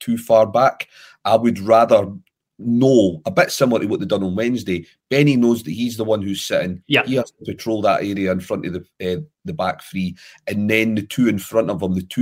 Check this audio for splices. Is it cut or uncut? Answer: uncut